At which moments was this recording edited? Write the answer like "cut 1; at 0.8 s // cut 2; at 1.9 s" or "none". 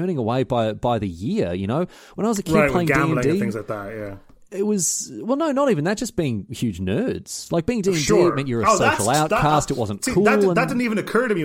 none